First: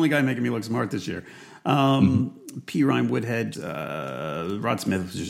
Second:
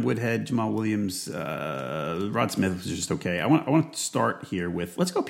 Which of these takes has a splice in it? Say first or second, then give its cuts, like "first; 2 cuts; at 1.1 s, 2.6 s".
first; 1 cut; at 3.5 s